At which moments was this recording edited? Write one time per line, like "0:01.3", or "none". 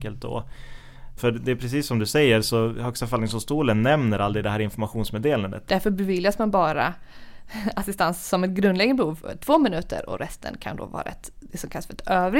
0:01.2
0:05.7

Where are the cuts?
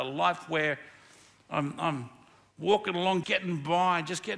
0:03.2

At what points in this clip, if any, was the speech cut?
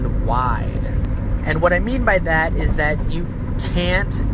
none

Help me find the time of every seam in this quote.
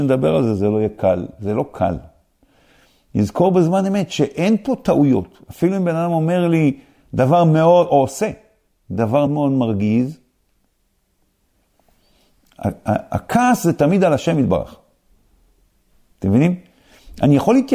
0:09.3

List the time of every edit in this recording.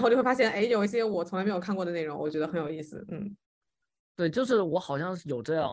none

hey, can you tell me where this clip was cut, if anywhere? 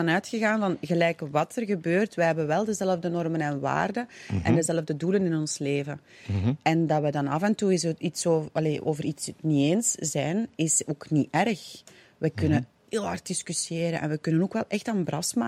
none

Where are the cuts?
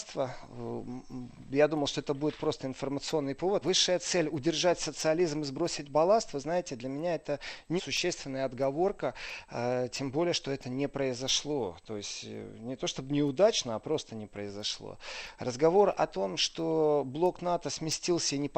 0:03.6
0:07.8

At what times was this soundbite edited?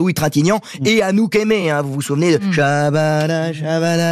none

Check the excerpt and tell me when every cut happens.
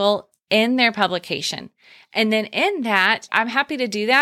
0:03.3

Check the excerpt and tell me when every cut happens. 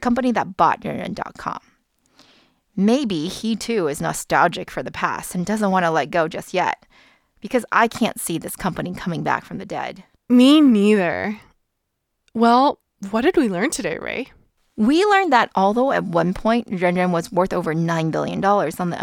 none

